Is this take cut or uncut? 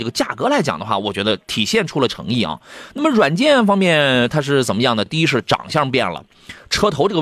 uncut